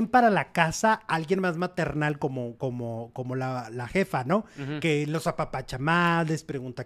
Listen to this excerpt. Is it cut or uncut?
uncut